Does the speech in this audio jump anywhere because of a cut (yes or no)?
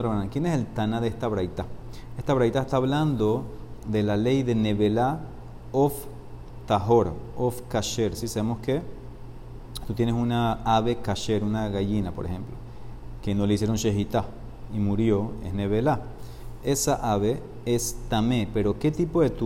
no